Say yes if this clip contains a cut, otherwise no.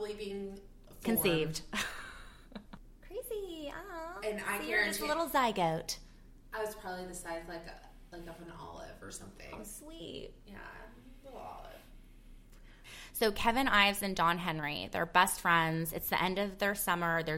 no